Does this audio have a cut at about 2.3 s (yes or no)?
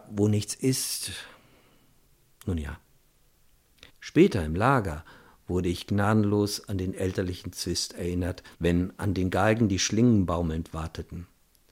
no